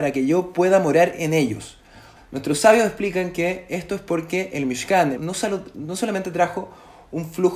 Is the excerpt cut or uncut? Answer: cut